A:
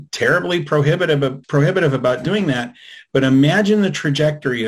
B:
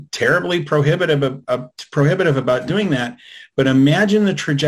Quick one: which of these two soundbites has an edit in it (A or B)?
A